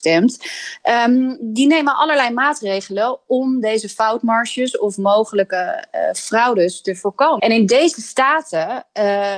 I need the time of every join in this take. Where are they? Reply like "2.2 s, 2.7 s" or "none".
7.4 s